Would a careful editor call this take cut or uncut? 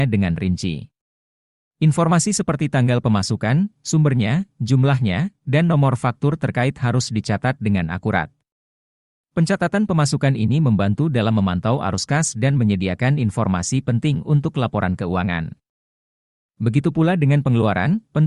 uncut